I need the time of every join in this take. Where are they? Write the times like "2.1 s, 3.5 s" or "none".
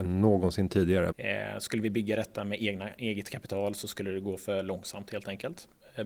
1.1 s